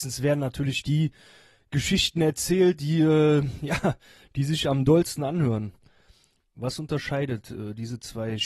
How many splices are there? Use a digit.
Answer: 1